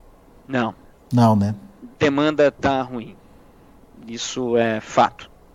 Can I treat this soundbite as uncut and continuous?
yes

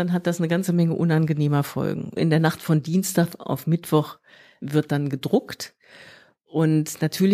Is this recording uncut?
no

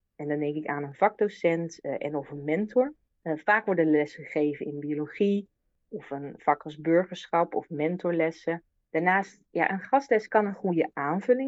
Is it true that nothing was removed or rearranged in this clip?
yes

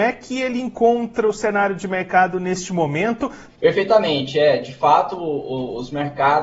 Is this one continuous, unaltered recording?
no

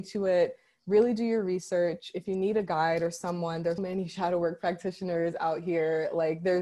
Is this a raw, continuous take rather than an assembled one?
no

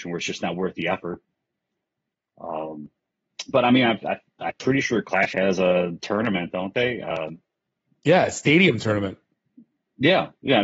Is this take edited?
no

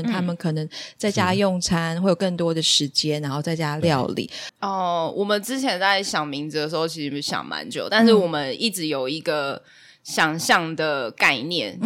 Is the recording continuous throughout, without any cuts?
no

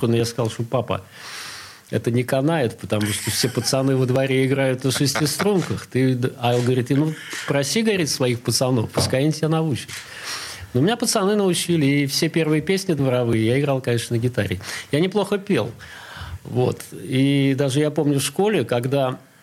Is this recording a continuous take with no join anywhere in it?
yes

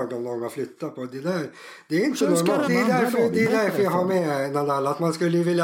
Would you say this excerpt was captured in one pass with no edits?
no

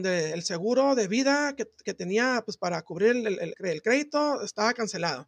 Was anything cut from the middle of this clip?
yes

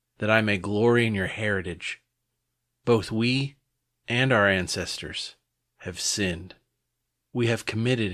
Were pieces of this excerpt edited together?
no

